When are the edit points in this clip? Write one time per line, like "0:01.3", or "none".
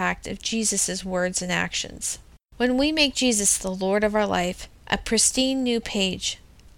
0:04.8